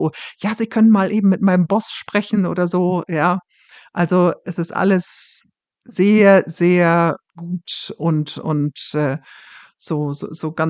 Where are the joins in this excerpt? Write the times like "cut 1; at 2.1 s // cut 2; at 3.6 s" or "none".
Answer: none